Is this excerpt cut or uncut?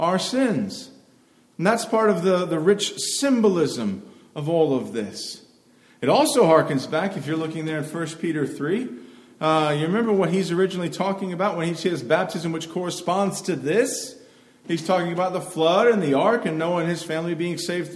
uncut